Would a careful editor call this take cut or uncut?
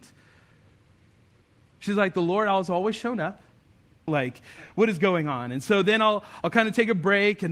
cut